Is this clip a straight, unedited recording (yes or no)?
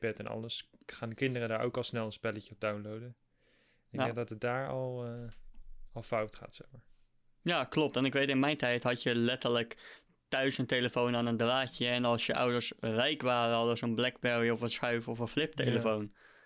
yes